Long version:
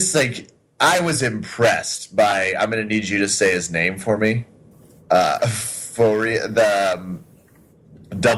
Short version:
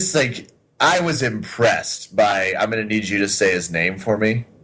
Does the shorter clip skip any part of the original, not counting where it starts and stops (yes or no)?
no